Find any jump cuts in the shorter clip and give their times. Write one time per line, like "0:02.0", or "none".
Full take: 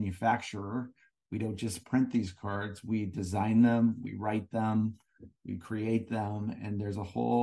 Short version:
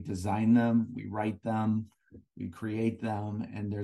none